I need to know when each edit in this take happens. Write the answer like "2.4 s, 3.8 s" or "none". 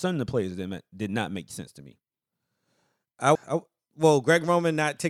3.4 s